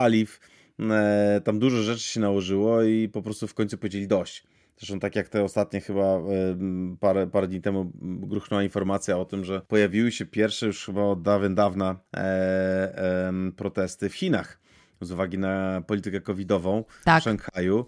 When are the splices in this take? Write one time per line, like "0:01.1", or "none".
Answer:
0:09.7
0:12.1

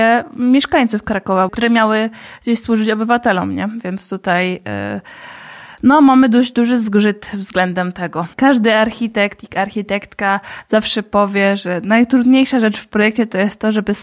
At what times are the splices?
0:01.5
0:08.3

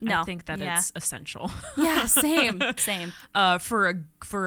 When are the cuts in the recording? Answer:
0:02.8

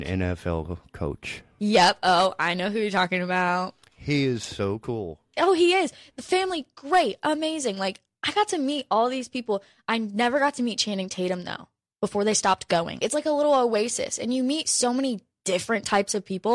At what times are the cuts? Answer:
0:13.0

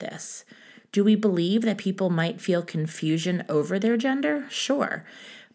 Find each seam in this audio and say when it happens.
none

